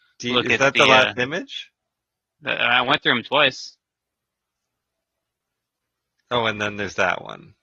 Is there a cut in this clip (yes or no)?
no